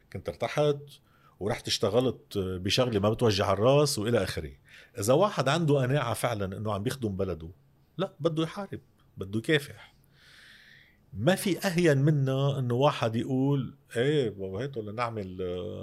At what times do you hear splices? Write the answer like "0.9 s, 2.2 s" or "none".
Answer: none

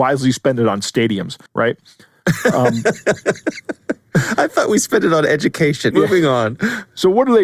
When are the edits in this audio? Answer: 1.5 s, 5.9 s

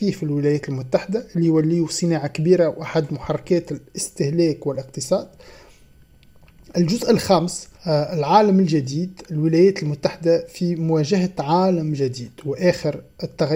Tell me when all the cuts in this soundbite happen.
7.8 s

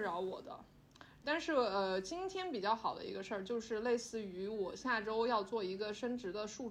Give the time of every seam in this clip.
1.2 s

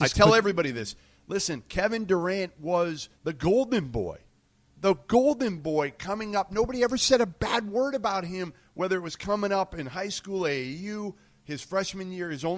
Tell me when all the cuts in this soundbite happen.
3.2 s

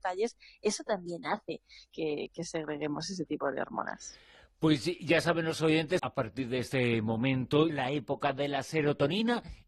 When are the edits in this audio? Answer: 6.0 s, 7.7 s

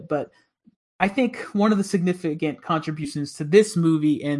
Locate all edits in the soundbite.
none

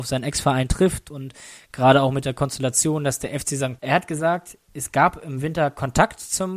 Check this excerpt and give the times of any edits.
3.8 s

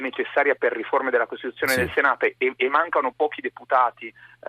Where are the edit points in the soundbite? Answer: none

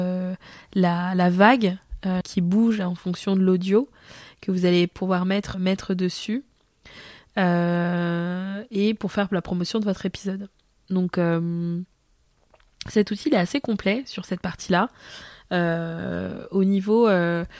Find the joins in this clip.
2.2 s, 5.5 s, 10.8 s

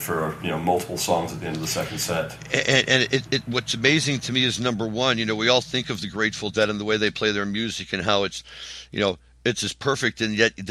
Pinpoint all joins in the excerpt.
none

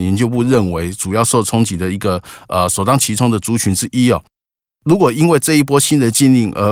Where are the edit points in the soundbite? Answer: 4.7 s

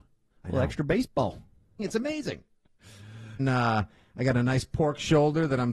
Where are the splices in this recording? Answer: 1.8 s, 3.4 s

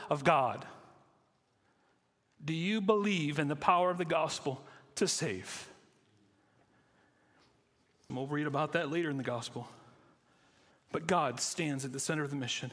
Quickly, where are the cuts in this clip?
8.1 s, 10.7 s

